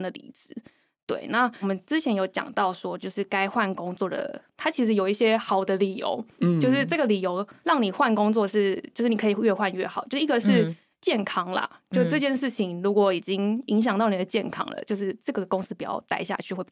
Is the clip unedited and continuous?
yes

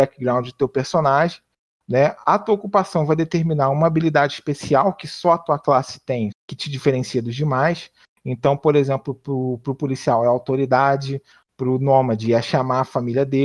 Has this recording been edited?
yes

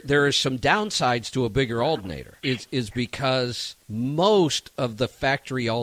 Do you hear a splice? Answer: yes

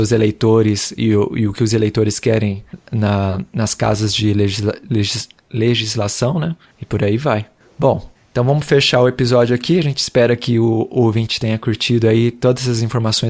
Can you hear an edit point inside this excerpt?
no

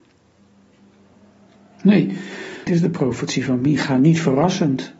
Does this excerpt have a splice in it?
yes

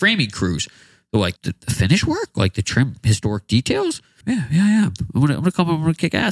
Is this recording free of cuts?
no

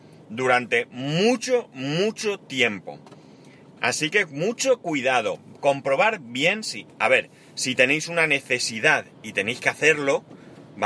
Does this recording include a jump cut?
no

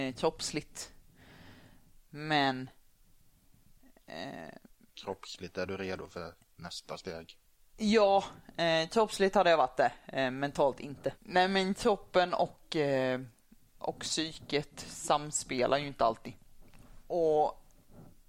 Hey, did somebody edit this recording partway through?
no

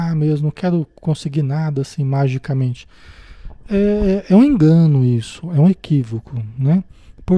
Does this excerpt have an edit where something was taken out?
no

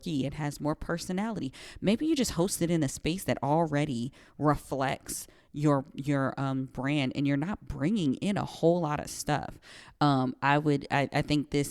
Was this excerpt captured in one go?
no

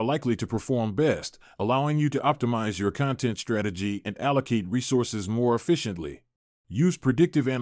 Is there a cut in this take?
yes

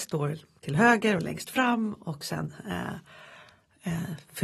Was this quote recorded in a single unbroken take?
yes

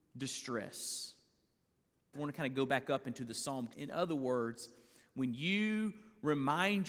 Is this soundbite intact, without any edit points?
no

